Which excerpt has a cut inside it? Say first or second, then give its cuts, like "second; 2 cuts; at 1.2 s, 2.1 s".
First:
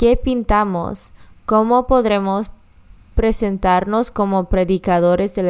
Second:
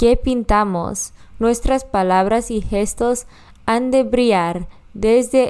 second; 1 cut; at 1.3 s